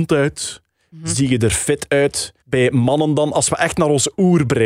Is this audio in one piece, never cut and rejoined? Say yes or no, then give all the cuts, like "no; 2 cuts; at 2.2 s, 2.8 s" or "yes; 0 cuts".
no; 1 cut; at 2.4 s